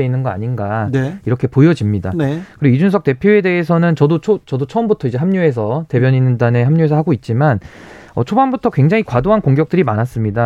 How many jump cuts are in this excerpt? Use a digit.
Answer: 0